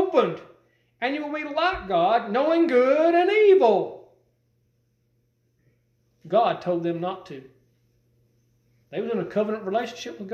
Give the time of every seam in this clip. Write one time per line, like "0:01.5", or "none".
0:08.8